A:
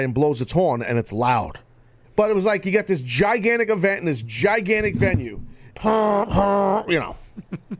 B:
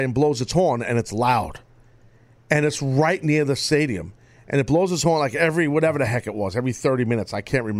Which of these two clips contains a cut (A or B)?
A